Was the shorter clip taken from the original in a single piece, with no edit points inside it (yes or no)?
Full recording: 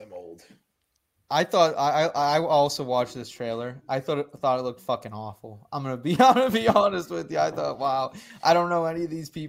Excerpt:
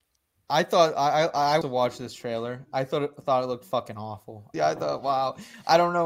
no